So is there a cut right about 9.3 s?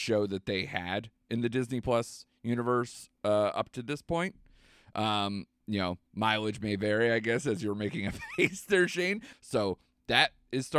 yes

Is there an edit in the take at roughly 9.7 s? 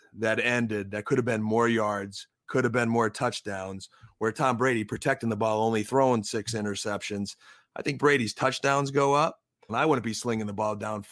yes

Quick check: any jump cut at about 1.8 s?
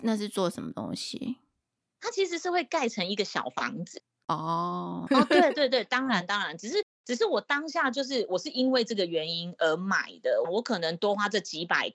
no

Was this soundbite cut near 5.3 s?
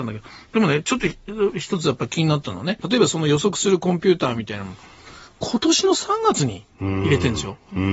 no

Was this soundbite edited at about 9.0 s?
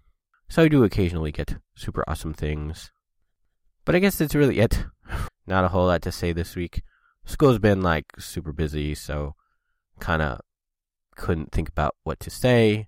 no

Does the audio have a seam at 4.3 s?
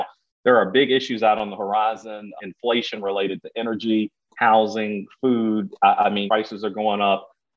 no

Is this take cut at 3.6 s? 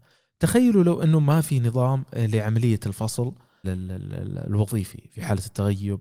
yes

